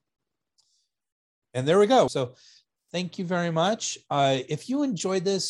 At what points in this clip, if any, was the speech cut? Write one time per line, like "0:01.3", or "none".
0:02.1

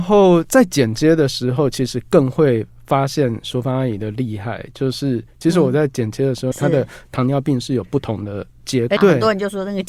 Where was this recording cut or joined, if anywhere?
0:06.5
0:09.0

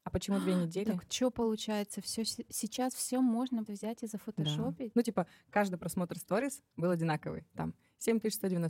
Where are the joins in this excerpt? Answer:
0:03.7
0:04.9

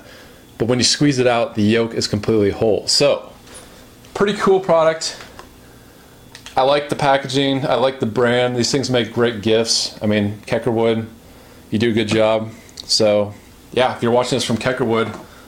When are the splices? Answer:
none

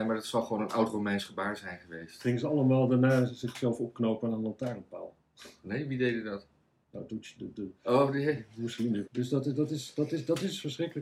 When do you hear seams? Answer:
0:09.0

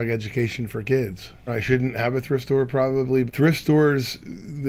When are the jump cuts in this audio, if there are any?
0:01.5
0:03.3

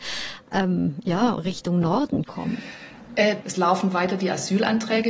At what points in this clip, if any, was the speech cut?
0:03.4

